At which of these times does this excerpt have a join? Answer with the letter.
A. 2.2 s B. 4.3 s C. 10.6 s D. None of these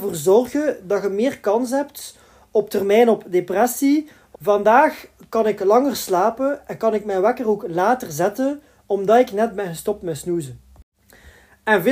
B